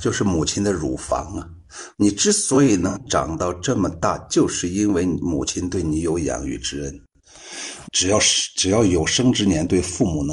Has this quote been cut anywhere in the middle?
yes; 2 cuts; at 1.9 s, 7.8 s

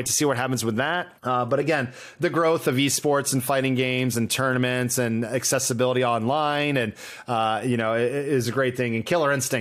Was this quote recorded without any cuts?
no; 1 cut; at 1.2 s

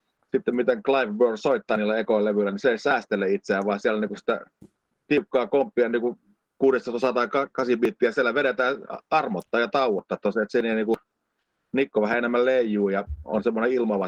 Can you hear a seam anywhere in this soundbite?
no; 0 cuts

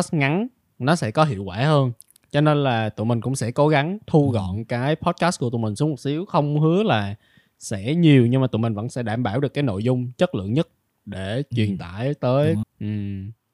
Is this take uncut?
no; 1 cut; at 12.6 s

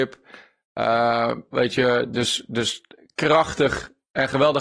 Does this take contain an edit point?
yes; 1 cut; at 1.5 s

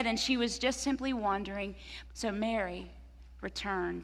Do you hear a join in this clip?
yes; 1 cut; at 2.0 s

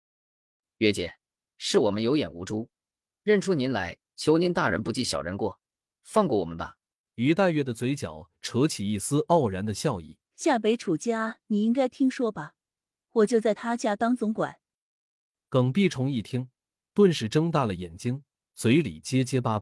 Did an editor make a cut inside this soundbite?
yes; 2 cuts; at 7.0 s, 10.2 s

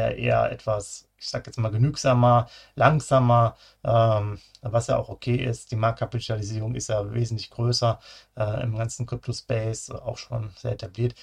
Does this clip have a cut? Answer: no; 0 cuts

